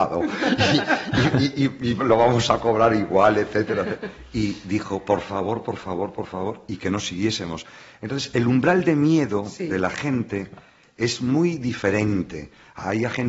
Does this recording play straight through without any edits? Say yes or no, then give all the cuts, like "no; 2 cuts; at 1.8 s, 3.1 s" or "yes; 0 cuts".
yes; 0 cuts